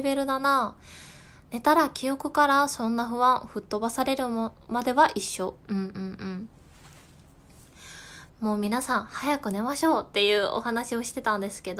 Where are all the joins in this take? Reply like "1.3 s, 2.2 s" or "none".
5.6 s, 8.3 s